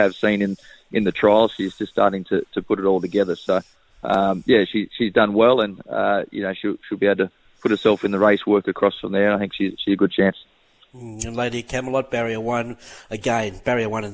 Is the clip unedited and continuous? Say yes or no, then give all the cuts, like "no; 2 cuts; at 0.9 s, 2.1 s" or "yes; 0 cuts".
yes; 0 cuts